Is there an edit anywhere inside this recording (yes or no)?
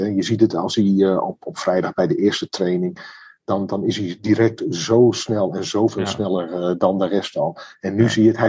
no